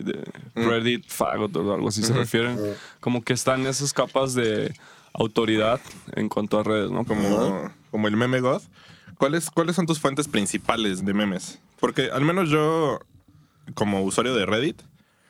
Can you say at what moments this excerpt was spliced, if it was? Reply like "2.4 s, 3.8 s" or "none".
7.1 s, 11.0 s